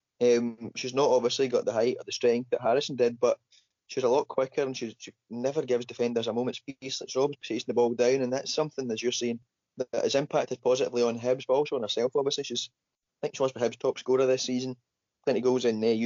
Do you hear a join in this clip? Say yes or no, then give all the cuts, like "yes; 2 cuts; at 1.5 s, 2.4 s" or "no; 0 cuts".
no; 0 cuts